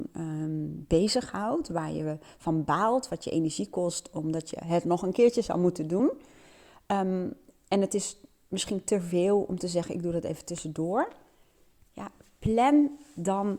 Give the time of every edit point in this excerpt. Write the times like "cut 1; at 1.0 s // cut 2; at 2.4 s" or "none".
none